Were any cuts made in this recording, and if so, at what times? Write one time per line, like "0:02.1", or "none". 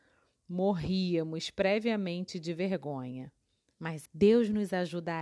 0:04.0